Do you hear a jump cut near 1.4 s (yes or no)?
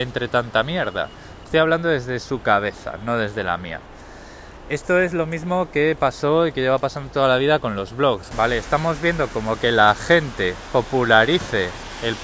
yes